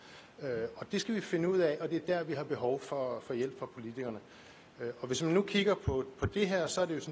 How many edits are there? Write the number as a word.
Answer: zero